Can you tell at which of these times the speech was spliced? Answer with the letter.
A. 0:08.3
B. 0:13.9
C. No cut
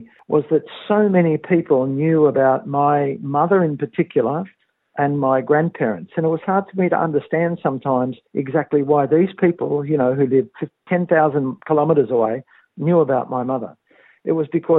A